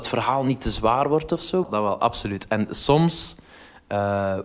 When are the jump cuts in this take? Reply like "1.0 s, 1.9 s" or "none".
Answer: 1.6 s